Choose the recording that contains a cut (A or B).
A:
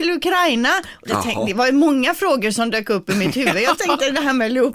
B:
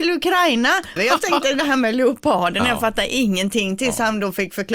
B